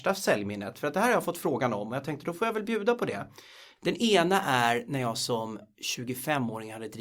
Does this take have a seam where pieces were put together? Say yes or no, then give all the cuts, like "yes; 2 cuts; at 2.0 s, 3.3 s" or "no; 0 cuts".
yes; 1 cut; at 3.8 s